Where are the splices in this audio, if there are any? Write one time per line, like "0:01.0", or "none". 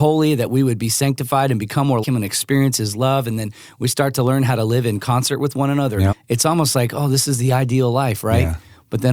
0:02.0
0:06.1